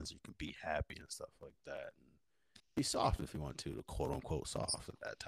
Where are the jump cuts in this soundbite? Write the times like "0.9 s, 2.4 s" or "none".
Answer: 2.6 s